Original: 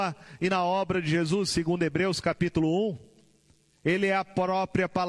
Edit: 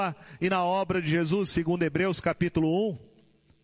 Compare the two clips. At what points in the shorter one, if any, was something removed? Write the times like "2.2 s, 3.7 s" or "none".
none